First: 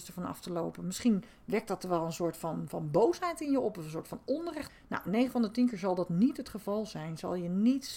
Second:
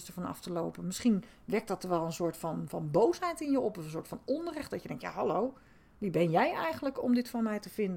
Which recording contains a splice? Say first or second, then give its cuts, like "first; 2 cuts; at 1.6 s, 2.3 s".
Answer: first; 1 cut; at 4.7 s